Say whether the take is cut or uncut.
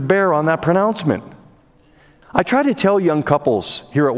cut